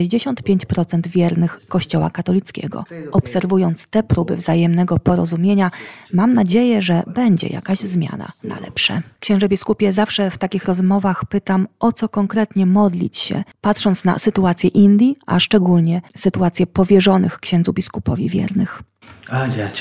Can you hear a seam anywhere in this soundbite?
yes; 1 cut; at 9.1 s

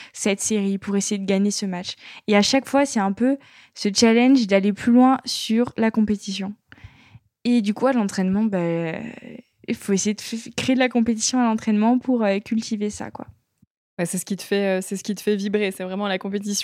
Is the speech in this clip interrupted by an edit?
no; 0 cuts

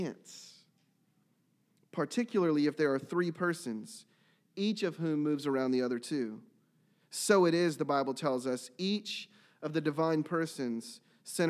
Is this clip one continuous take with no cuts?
yes; 0 cuts

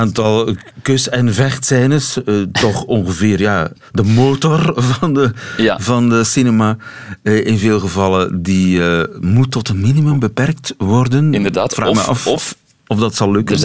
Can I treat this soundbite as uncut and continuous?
yes; 0 cuts

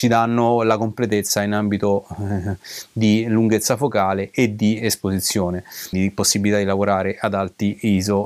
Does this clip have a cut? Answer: yes; 1 cut; at 5.9 s

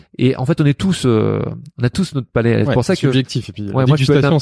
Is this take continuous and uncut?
yes; 0 cuts

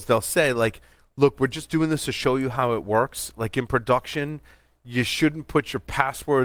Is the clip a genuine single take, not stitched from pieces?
yes; 0 cuts

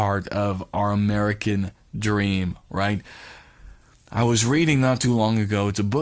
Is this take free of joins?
yes; 0 cuts

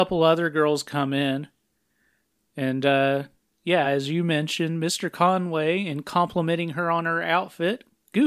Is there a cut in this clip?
no; 0 cuts

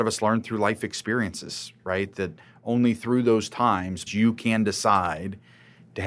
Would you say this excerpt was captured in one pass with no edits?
no; 1 cut; at 4.1 s

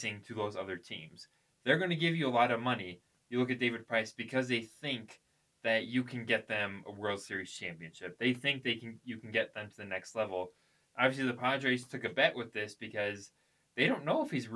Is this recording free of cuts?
yes; 0 cuts

